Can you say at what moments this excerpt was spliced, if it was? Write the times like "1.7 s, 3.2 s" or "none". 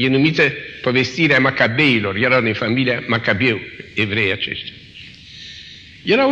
none